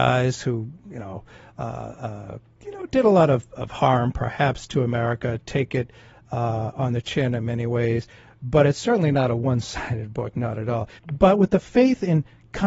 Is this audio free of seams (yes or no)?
no